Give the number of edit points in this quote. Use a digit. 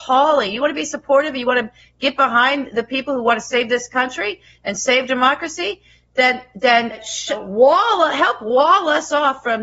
0